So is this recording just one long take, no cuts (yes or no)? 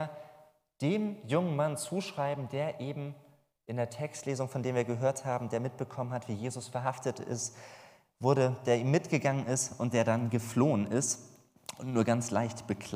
yes